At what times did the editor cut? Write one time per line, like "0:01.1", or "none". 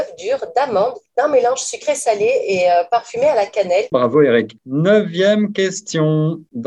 0:03.9